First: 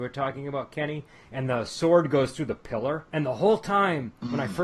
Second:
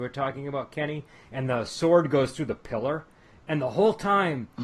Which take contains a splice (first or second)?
first